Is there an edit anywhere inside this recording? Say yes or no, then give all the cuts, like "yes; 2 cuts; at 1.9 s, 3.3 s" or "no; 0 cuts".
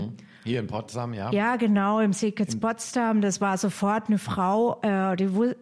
no; 0 cuts